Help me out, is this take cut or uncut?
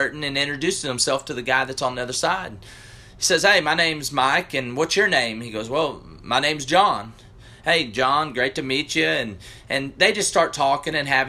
uncut